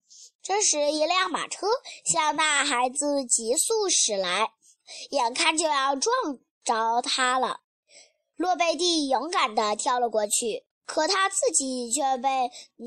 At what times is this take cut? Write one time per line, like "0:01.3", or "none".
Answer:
0:10.7